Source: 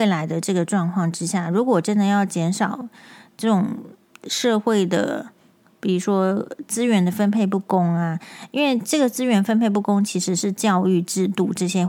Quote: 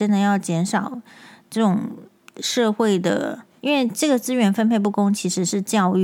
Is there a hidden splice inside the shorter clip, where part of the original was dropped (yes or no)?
yes